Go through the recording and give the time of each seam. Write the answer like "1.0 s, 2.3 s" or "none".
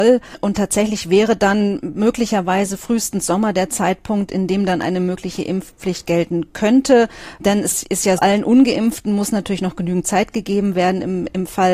8.2 s